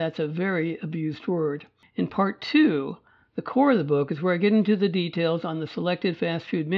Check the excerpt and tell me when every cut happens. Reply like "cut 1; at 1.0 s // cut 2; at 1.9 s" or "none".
cut 1; at 1.8 s